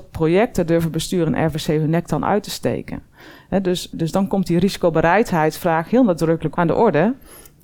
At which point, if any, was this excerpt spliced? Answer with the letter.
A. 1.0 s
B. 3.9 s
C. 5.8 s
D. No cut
B